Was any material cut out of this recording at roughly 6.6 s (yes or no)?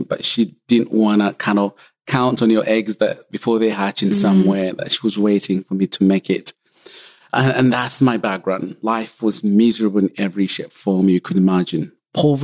no